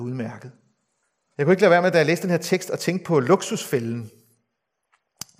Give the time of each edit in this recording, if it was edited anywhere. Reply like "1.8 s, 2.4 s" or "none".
1.3 s